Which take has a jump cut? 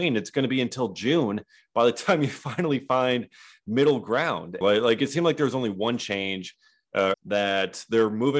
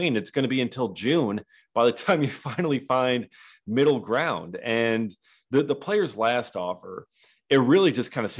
first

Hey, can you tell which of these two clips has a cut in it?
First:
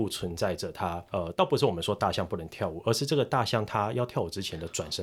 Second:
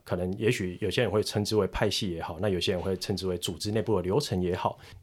first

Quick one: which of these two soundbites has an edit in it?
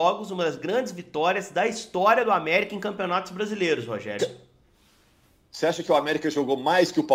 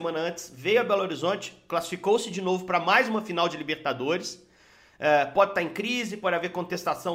first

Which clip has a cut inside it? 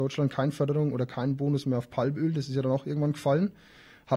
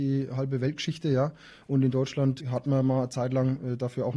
second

